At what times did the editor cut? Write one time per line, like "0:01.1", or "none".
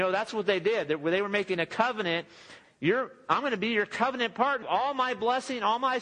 0:02.6
0:04.6